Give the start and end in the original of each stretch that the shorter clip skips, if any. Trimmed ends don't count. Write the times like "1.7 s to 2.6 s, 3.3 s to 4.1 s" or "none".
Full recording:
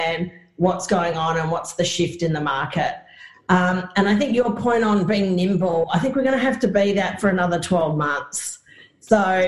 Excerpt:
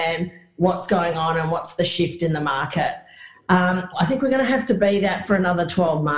3.9 s to 5.8 s